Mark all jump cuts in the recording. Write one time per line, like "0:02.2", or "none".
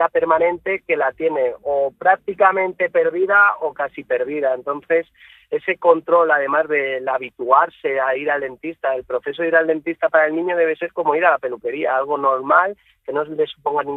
none